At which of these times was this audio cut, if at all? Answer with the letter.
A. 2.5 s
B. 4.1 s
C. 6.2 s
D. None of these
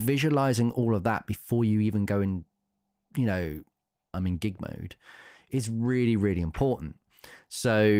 B